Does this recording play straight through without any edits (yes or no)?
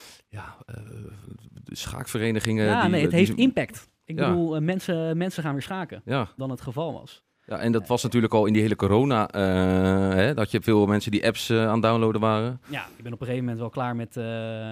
no